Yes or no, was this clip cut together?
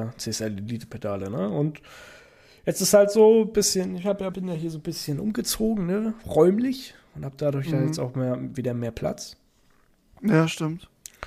yes